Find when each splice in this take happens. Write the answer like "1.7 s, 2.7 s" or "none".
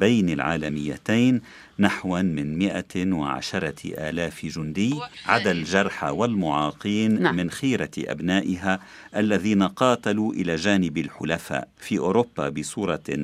11.7 s